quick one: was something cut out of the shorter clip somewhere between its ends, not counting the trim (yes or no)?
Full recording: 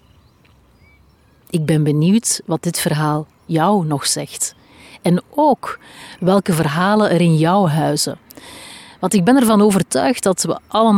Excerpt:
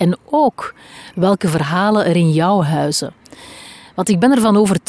no